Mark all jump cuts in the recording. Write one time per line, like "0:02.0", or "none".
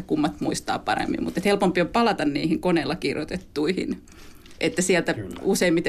none